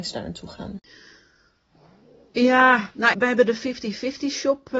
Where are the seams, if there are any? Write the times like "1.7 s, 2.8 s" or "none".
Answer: 3.1 s